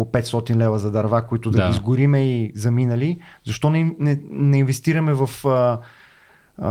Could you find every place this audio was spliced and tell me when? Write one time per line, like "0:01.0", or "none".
none

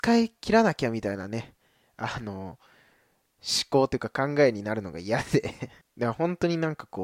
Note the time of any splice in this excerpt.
0:05.8

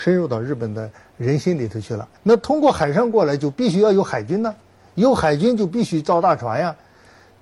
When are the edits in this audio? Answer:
0:02.2

